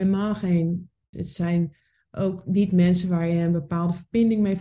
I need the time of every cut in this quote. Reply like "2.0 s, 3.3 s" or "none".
1.1 s